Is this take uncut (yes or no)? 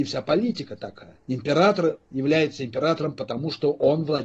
yes